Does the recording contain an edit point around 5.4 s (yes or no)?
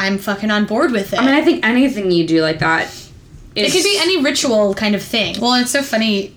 yes